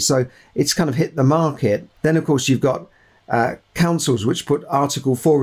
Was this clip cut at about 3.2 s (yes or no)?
no